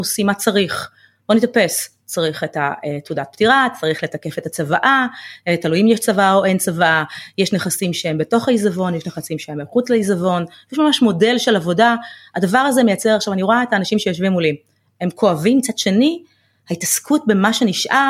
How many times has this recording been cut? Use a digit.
0